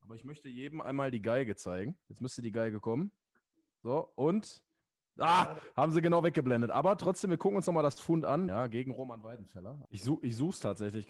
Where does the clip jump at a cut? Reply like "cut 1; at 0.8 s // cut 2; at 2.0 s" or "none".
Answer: cut 1; at 2.0 s // cut 2; at 8.5 s // cut 3; at 9.8 s